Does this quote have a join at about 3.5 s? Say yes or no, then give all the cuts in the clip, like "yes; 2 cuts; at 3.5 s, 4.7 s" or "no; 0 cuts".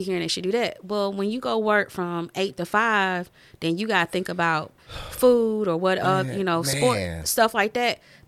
no; 0 cuts